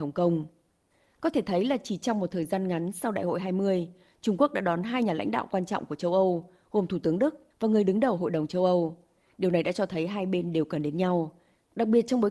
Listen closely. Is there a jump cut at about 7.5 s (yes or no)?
yes